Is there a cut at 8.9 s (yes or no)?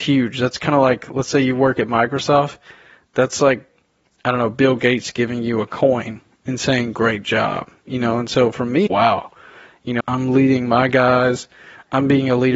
yes